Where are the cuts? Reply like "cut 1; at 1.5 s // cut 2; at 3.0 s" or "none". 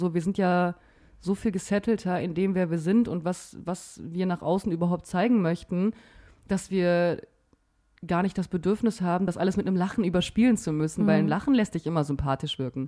none